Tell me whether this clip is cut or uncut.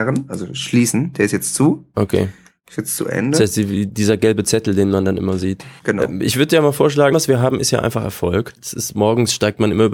cut